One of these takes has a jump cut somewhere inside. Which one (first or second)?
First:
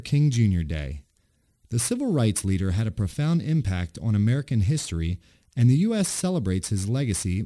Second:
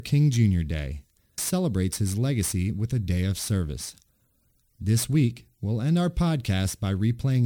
second